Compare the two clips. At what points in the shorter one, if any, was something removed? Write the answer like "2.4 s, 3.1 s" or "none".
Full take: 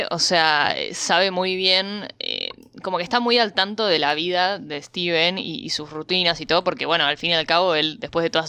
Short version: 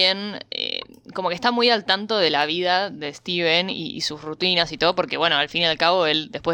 none